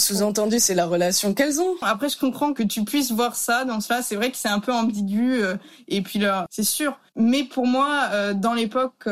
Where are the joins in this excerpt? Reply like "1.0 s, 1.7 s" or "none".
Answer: 1.8 s, 6.5 s